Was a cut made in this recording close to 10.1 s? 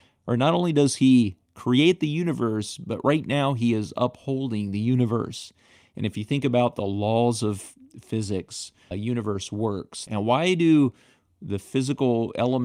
yes; 2 cuts; at 8.9 s, 10.1 s

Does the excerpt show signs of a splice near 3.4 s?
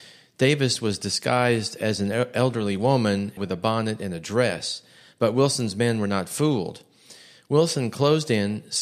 yes; 1 cut; at 3.4 s

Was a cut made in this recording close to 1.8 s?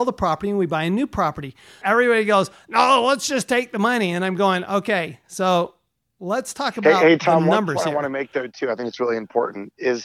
yes; 1 cut; at 1.8 s

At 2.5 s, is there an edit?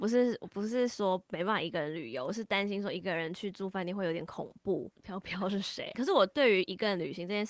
no; 2 cuts; at 4.9 s, 5.9 s

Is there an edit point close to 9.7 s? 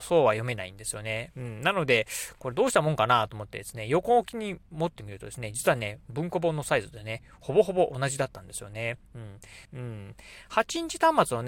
yes; 1 cut; at 9.7 s

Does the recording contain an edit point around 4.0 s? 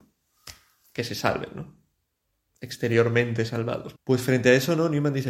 yes; 1 cut; at 4.0 s

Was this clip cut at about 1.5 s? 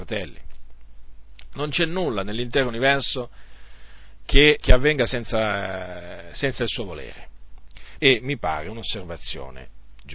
no; 2 cuts; at 4.6 s, 8.0 s

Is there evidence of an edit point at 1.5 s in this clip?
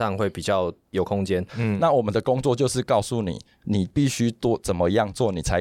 yes; 1 cut; at 1.5 s

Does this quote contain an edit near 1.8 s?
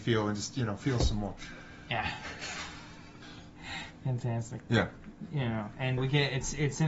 no; 2 cuts; at 4.6 s, 6.0 s

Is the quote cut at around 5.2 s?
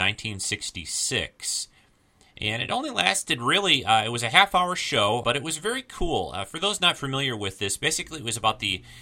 yes; 1 cut; at 5.2 s

